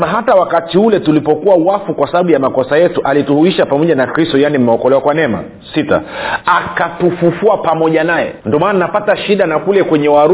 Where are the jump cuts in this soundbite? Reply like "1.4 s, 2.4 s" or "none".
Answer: 8.4 s